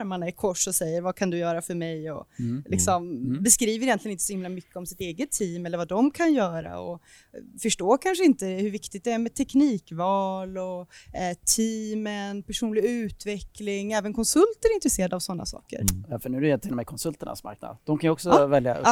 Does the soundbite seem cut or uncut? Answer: uncut